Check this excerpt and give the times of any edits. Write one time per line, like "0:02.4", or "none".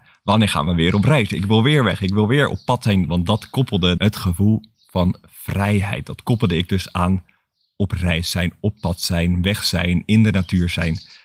0:04.0